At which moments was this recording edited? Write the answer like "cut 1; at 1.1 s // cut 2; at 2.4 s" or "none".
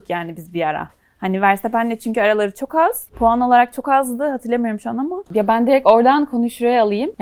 cut 1; at 5.3 s